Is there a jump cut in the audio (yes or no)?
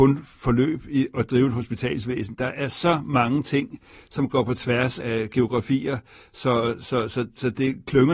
yes